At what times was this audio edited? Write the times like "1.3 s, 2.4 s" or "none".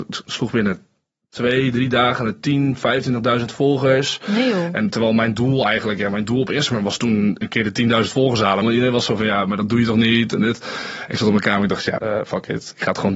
8.6 s, 12.0 s

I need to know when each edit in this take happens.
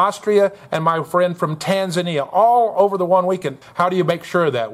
3.6 s

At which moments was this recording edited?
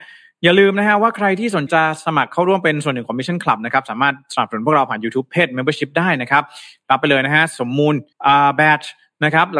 1.7 s, 8.1 s

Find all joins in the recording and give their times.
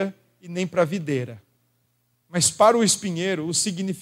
2.2 s

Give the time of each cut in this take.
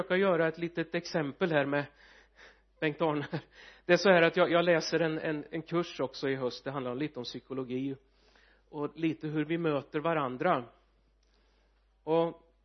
none

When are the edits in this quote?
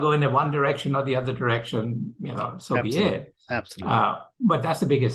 none

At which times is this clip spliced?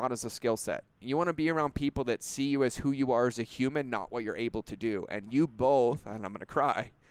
none

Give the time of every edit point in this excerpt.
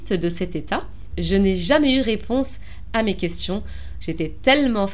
1.1 s, 4.0 s

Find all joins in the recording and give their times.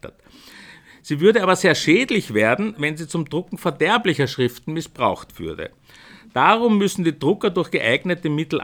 none

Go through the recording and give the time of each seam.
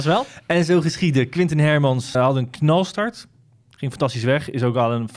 2.1 s

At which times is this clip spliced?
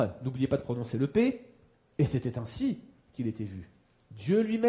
1.9 s

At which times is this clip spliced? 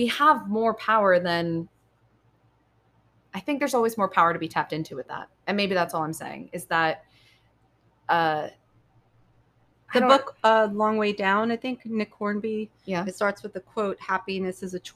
none

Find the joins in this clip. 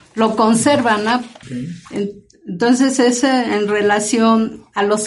1.4 s

